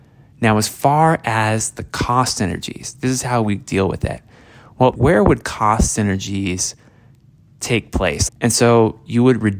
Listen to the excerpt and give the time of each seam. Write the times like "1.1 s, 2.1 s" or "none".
4.9 s, 8.3 s